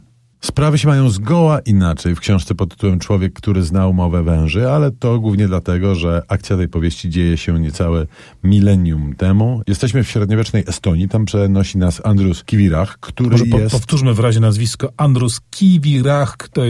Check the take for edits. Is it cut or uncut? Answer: uncut